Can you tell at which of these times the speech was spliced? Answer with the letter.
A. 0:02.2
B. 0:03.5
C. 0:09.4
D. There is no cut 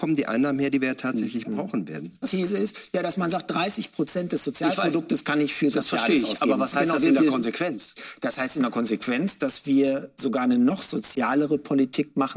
A